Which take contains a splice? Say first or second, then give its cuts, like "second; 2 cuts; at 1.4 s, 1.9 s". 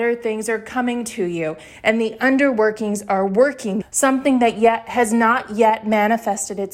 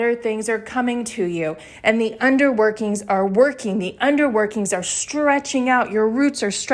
first; 1 cut; at 3.8 s